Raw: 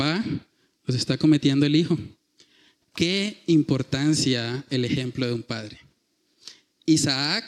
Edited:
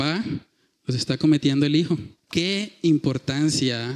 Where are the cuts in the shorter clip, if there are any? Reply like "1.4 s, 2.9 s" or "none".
2.2 s